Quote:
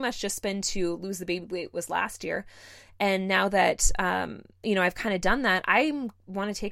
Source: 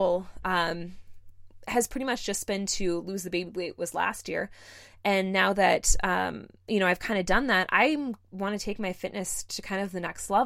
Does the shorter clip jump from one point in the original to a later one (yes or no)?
no